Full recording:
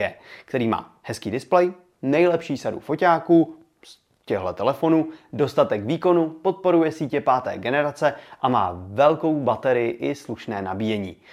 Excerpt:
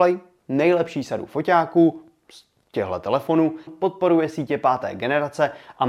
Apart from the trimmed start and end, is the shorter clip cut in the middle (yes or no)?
yes